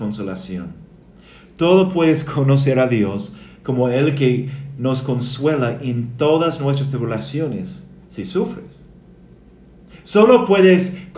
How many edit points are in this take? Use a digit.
1